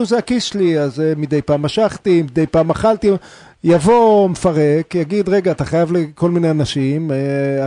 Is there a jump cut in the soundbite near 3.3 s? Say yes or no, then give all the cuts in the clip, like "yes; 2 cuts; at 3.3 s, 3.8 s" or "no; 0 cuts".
no; 0 cuts